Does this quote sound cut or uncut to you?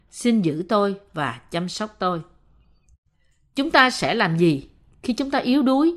uncut